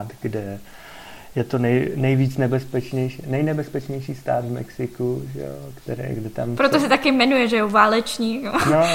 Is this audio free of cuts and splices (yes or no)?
yes